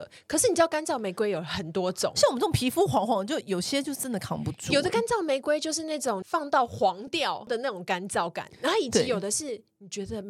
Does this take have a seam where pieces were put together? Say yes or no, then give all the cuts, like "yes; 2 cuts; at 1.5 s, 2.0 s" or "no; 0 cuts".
no; 0 cuts